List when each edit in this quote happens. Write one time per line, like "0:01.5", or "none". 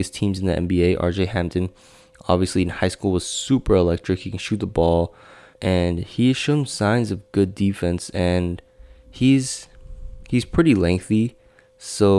0:05.5